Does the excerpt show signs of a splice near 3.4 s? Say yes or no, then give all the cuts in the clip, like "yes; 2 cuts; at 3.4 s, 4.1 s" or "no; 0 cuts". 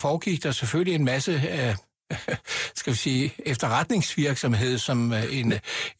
no; 0 cuts